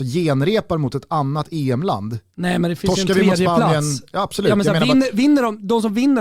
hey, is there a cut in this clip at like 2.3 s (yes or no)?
yes